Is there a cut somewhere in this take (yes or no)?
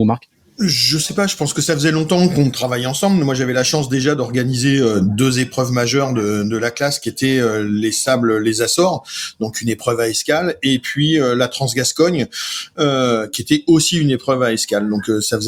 no